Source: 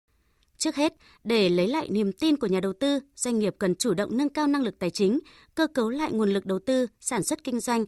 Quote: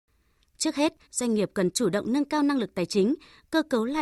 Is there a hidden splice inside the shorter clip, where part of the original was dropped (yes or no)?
yes